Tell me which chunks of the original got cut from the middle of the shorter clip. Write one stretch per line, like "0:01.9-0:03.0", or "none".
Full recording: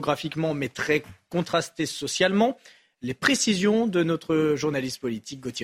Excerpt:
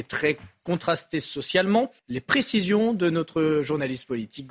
0:02.6-0:02.9